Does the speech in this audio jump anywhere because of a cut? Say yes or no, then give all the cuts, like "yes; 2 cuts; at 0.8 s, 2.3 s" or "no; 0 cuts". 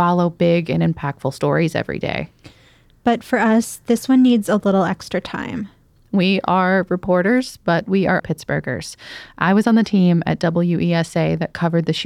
yes; 1 cut; at 8.2 s